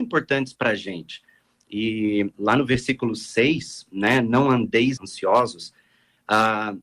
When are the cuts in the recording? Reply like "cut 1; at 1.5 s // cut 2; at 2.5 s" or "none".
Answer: cut 1; at 5.0 s